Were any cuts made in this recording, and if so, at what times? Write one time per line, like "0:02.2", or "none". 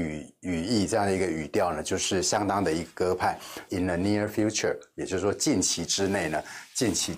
0:03.7